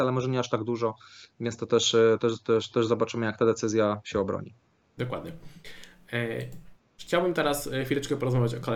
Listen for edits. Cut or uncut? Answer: uncut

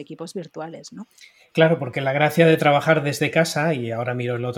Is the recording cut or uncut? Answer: uncut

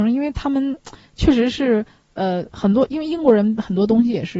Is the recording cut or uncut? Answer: uncut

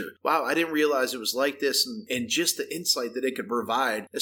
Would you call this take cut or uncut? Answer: uncut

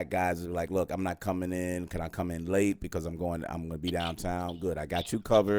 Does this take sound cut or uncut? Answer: uncut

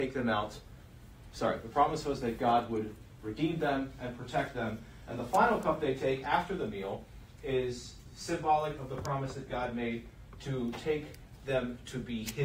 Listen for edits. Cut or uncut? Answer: uncut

